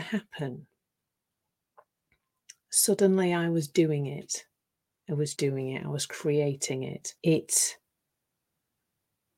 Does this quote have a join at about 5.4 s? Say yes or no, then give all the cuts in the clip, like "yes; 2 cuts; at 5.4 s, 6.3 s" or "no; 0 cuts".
yes; 2 cuts; at 5.4 s, 7.2 s